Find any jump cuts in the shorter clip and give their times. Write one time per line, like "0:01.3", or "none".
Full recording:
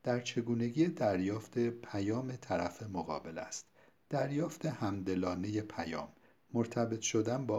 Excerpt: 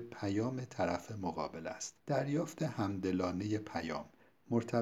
0:02.0